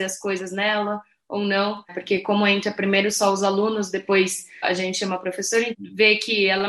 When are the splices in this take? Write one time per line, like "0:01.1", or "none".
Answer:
0:01.9
0:04.6
0:05.7